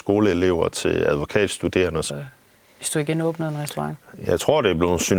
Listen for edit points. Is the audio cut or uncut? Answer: cut